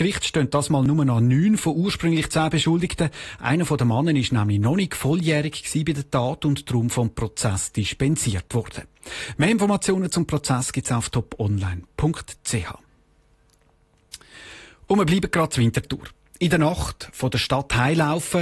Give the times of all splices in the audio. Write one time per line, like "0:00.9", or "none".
none